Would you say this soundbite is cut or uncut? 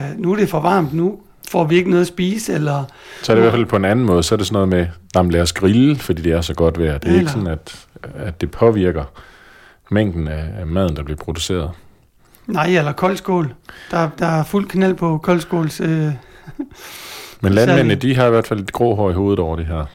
uncut